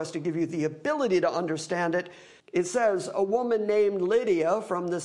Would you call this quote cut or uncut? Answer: cut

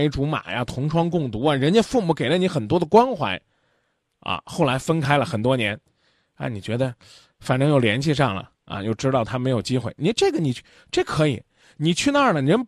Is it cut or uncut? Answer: uncut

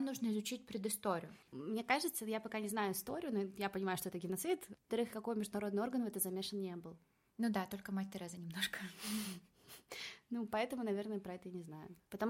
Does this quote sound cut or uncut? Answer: cut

